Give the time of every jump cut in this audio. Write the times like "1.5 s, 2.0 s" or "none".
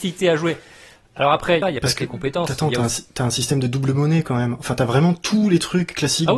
1.6 s